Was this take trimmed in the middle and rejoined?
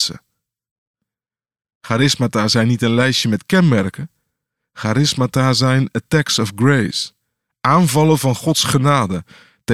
no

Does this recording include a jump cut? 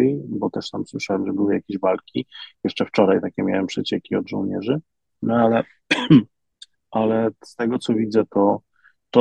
no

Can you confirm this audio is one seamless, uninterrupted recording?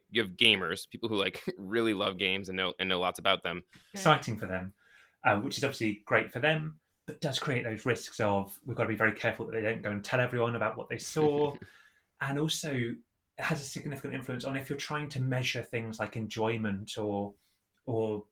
no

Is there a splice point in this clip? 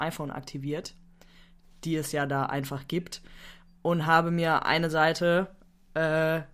no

